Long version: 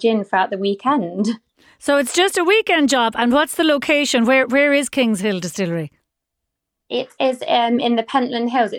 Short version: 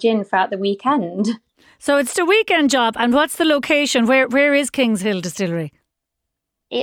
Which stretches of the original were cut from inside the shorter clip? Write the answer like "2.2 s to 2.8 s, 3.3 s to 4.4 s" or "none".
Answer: 2.1 s to 2.3 s

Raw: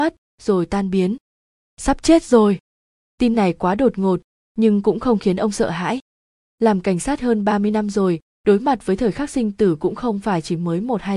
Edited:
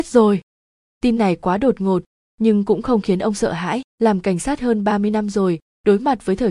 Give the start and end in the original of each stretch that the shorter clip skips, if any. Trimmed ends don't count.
6.1 s to 6.5 s

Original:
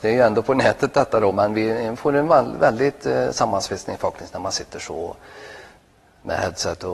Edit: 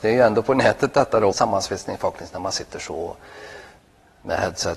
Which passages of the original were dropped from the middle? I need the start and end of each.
1.3 s to 3.3 s

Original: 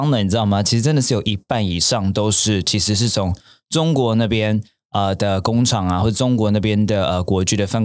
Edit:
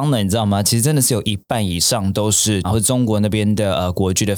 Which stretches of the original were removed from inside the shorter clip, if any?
2.6 s to 6.0 s

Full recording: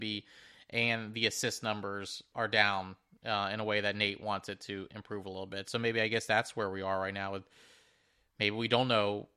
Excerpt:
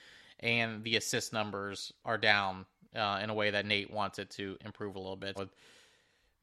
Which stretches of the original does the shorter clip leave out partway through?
5.7 s to 7.3 s

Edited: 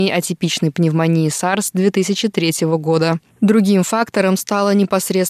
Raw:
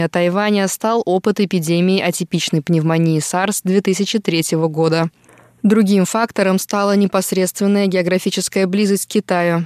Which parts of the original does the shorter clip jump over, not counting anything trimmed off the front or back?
5.2 s to 5.5 s

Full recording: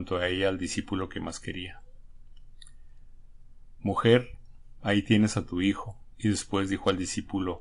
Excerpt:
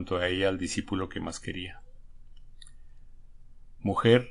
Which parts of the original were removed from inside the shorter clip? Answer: none

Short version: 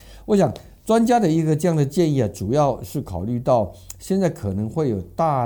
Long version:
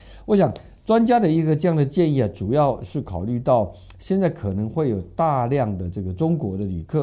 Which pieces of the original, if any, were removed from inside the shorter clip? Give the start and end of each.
none

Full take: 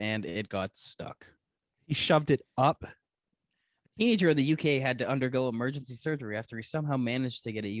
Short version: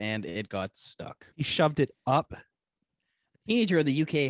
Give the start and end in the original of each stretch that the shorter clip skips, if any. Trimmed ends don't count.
1.3 s to 1.8 s

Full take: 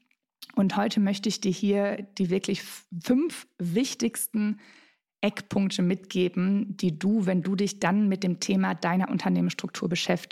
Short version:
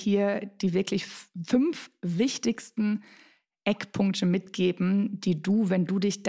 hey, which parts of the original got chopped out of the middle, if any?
none

